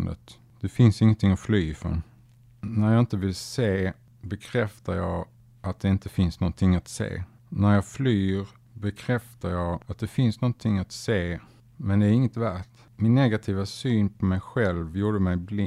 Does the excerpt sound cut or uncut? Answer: uncut